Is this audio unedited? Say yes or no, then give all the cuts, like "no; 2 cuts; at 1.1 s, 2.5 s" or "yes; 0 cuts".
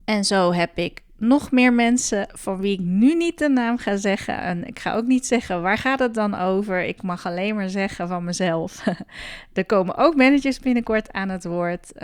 yes; 0 cuts